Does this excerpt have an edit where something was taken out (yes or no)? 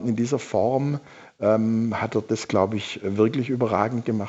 no